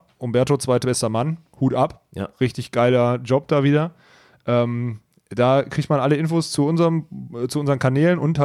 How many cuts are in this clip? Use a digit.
0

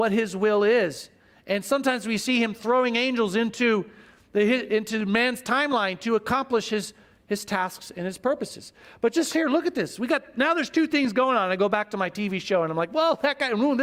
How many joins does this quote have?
0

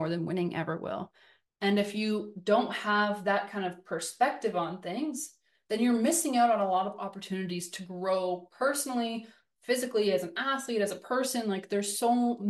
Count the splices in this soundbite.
1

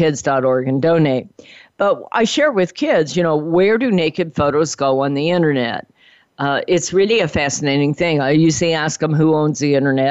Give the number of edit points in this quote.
0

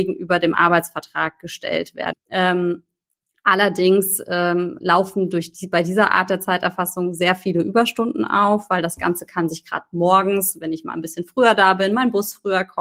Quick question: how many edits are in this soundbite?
1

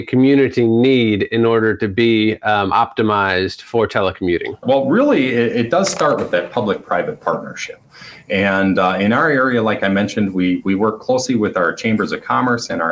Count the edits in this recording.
1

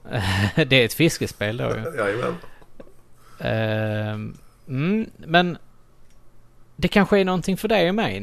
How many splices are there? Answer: 0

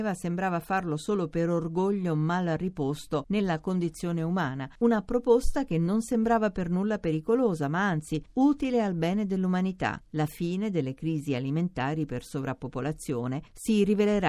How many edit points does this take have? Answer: 1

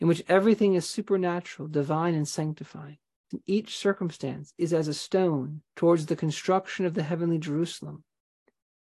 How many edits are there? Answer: 2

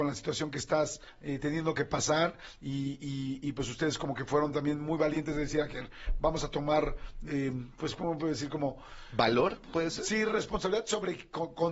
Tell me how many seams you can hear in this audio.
1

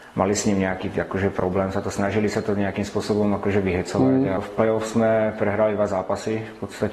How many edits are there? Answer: 1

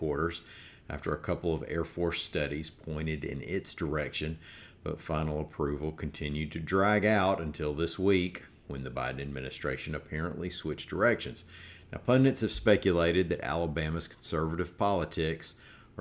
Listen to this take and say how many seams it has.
0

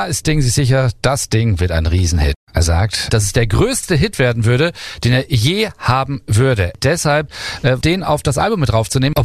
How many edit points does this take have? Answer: 2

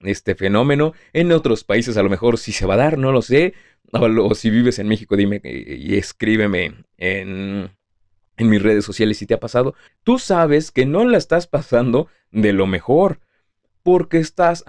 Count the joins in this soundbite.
1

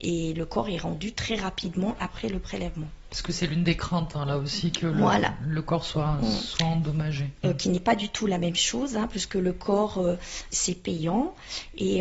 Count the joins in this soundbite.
2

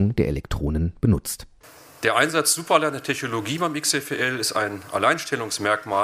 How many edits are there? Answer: 0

